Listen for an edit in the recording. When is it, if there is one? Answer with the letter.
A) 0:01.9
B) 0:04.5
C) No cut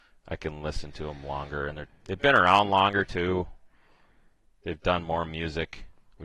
A